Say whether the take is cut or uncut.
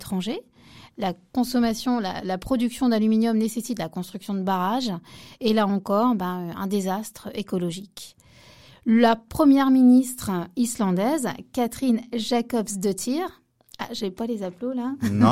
uncut